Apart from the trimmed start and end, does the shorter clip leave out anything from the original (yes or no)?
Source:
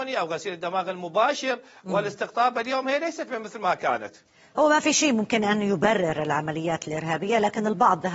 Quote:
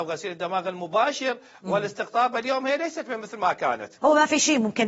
yes